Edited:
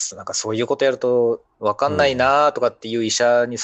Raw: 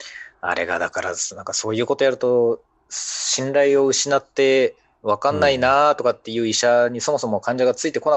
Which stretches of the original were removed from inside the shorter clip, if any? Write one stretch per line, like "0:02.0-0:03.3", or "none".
0:02.7-0:05.0